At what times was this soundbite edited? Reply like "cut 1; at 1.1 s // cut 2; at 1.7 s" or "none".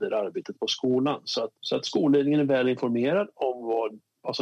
cut 1; at 1.6 s